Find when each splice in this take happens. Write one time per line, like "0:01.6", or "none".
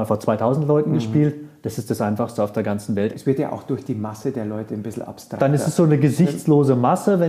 0:03.1